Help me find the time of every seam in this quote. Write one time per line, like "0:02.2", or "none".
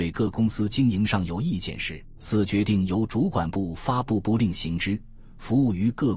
0:02.2